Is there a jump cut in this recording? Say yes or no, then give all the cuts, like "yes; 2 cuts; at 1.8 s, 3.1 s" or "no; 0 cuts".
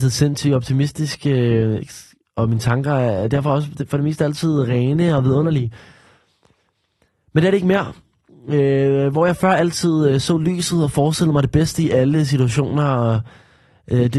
no; 0 cuts